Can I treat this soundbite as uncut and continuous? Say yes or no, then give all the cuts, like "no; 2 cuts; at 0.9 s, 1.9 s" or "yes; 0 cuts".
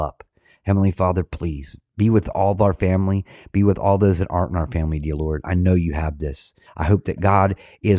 no; 1 cut; at 6.7 s